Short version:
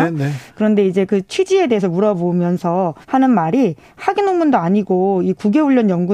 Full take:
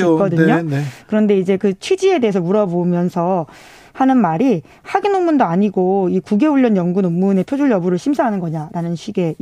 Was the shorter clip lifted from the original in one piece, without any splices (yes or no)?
no